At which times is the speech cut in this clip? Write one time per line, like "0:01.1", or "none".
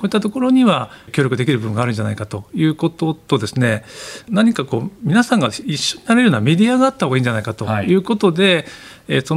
none